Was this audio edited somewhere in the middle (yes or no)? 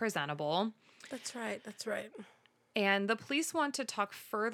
no